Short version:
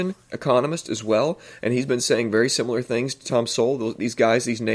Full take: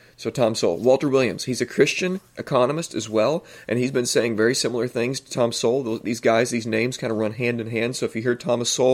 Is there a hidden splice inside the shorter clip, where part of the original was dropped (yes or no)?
no